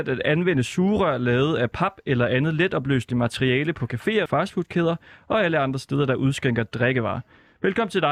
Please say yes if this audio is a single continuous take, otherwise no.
no